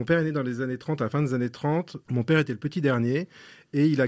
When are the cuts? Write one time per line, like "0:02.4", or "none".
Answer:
0:02.0

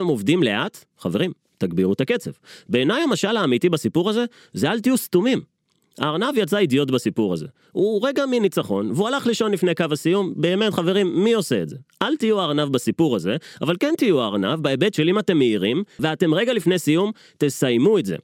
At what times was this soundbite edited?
0:16.0

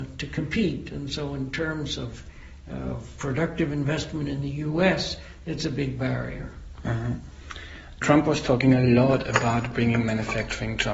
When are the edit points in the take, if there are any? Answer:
0:03.2

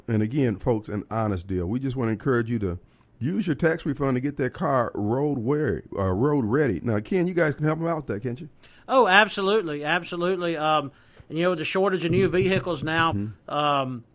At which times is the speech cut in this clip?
0:13.1

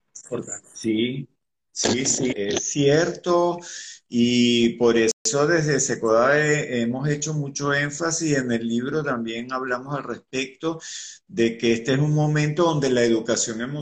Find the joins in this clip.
0:02.3

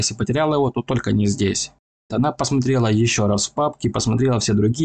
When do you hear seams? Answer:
0:02.1

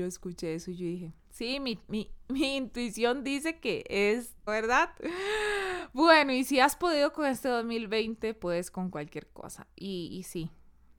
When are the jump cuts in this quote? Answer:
0:04.5

